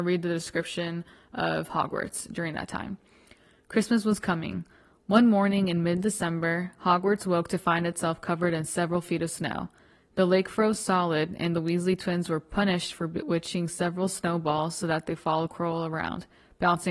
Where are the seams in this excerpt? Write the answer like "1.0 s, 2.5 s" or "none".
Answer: none